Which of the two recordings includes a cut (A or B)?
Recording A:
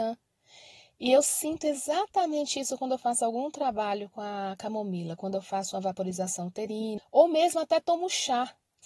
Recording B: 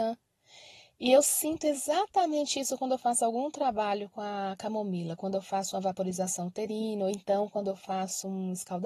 A